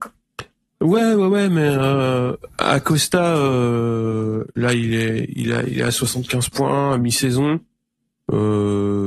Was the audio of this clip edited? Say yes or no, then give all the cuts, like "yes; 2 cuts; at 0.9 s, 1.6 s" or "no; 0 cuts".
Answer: no; 0 cuts